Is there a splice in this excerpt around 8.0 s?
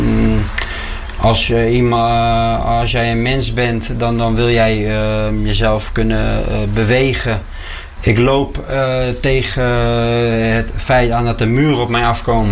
yes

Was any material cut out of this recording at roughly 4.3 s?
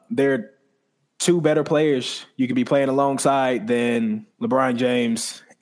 yes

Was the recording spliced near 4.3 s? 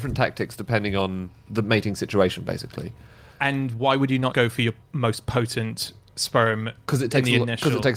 yes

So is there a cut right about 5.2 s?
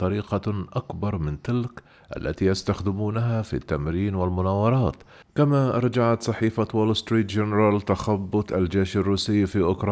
yes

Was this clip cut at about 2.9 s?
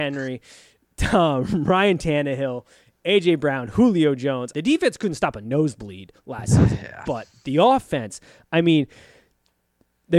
no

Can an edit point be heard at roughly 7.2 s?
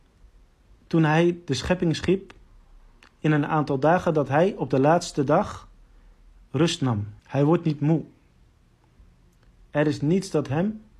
yes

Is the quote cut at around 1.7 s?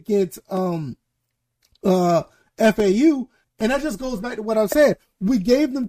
no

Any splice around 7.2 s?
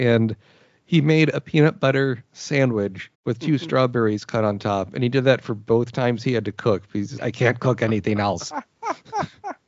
yes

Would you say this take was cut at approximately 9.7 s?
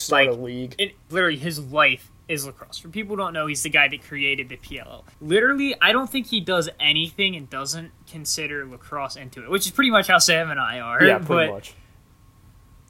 no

